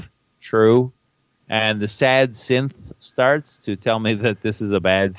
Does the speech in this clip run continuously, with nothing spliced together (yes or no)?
yes